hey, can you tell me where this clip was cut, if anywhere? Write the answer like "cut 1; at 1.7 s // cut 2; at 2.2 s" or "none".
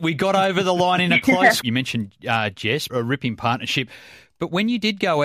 cut 1; at 1.6 s // cut 2; at 2.9 s

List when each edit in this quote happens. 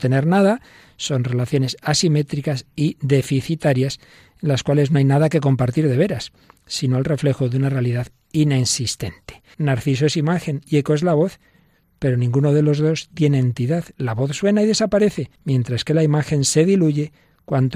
cut 1; at 9.5 s // cut 2; at 13.9 s // cut 3; at 15.4 s

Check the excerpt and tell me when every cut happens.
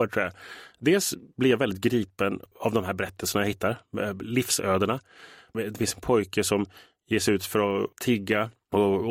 none

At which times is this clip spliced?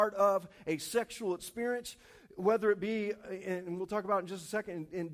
none

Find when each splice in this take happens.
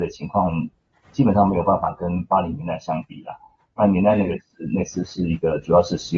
none

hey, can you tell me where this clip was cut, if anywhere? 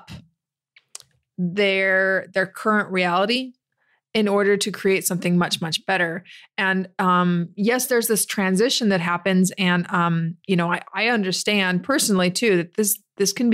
none

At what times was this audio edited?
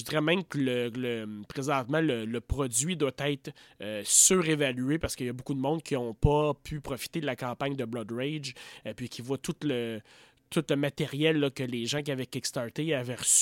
none

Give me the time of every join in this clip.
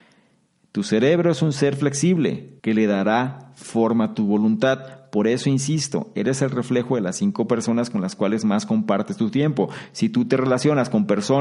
cut 1; at 2.6 s

